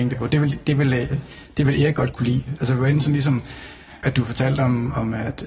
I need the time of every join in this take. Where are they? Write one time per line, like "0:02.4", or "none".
0:02.5
0:04.0